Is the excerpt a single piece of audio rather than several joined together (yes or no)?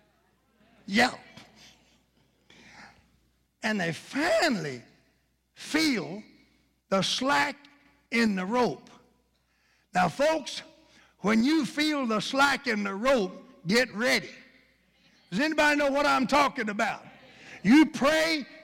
yes